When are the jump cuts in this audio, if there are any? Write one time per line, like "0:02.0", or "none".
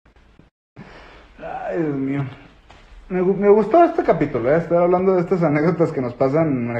none